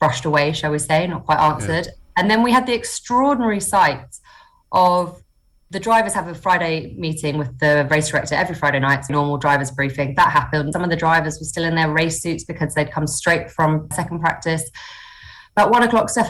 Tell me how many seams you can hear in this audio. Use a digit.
3